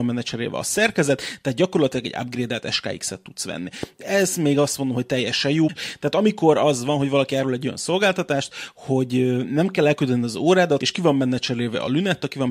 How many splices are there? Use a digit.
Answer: 2